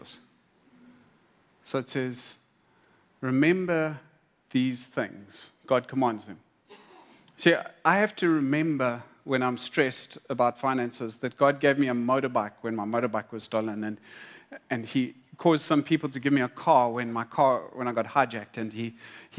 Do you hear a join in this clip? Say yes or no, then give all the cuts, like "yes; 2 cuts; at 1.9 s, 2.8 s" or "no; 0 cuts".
no; 0 cuts